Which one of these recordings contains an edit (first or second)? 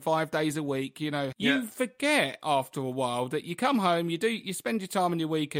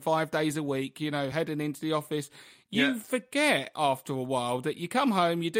first